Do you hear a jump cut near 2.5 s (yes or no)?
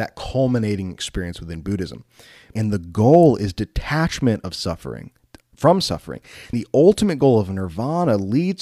yes